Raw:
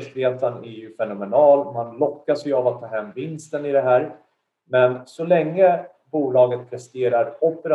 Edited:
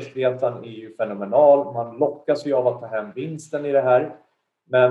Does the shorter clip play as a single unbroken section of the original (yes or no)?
yes